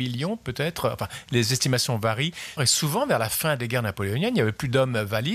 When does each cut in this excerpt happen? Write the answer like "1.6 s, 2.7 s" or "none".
2.6 s